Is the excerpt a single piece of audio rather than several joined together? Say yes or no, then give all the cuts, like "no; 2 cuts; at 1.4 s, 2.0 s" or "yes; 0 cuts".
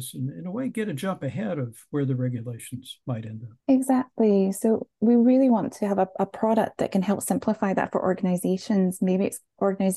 no; 1 cut; at 3.6 s